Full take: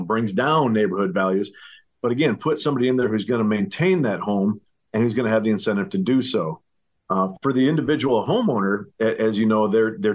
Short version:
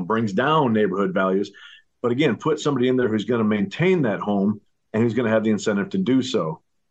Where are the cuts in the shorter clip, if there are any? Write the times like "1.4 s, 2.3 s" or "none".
none